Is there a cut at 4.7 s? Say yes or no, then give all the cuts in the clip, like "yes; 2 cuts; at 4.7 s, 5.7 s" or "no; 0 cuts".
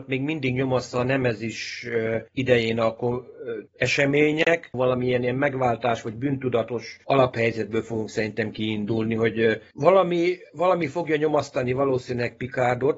yes; 2 cuts; at 3.7 s, 4.7 s